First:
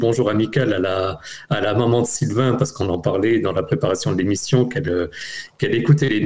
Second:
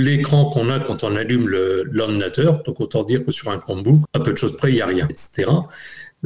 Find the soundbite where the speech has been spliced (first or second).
second